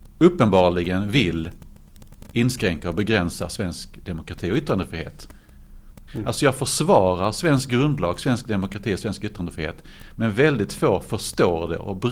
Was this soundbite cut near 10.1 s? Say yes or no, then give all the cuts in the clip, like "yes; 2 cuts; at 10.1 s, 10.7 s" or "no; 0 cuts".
no; 1 cut; at 6.1 s